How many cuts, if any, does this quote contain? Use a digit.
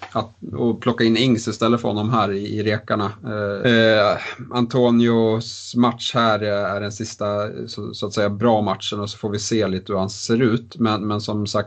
1